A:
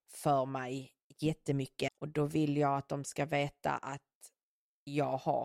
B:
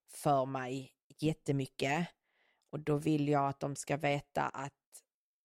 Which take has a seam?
A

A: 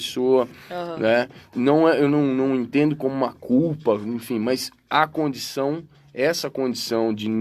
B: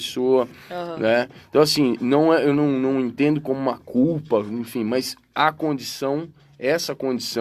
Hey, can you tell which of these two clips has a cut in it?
A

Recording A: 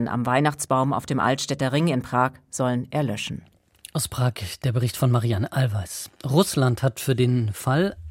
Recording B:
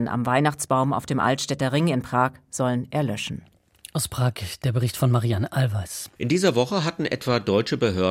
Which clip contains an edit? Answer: B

